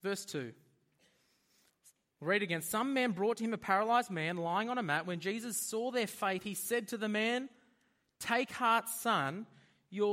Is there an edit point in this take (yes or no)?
no